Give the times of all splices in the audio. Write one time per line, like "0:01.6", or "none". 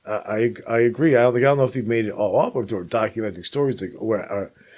none

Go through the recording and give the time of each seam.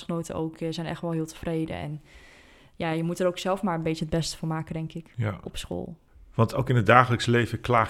none

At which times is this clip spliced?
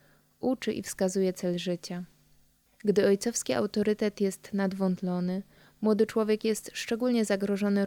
0:02.7

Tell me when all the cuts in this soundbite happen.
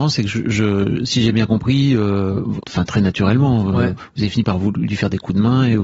0:02.6

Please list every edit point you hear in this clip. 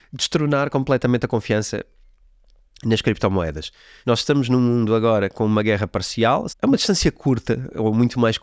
0:04.0
0:06.5

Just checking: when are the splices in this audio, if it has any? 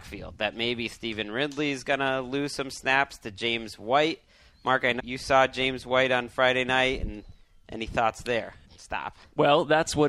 0:05.0
0:08.6

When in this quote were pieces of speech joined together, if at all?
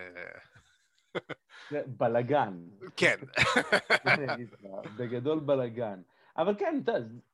none

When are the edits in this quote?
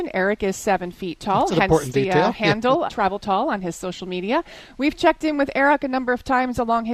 0:02.9

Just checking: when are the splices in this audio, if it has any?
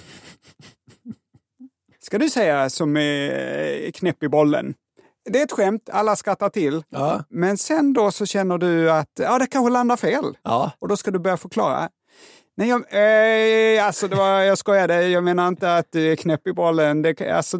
none

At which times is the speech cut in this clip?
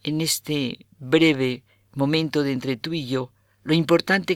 0:00.9

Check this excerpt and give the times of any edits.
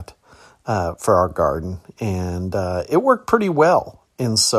none

